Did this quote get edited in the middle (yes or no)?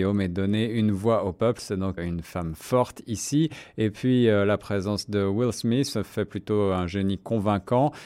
yes